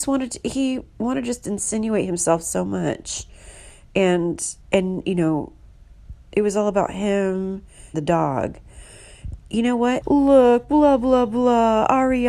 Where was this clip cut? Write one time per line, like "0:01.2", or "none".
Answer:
0:04.6
0:07.9
0:10.0